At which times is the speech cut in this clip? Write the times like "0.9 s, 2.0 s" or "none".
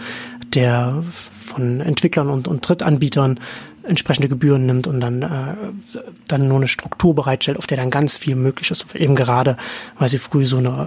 none